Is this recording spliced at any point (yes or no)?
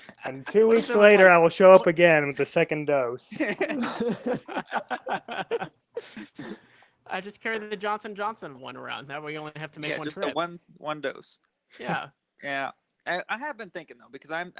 no